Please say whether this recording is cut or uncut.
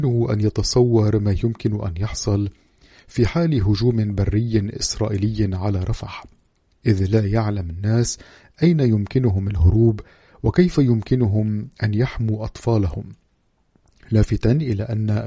uncut